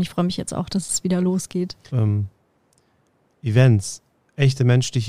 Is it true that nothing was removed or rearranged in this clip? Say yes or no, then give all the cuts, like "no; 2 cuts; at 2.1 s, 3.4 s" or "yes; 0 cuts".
no; 1 cut; at 1.9 s